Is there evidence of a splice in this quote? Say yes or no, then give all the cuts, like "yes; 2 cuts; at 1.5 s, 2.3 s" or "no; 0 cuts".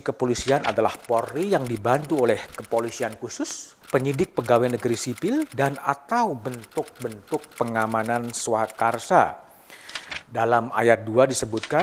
yes; 1 cut; at 3.8 s